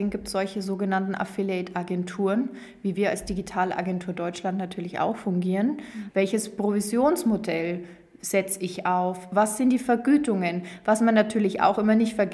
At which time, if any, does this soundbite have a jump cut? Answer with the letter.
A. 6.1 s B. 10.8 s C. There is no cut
A